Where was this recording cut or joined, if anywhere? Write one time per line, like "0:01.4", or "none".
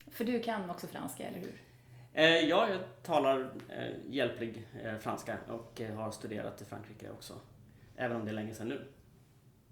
none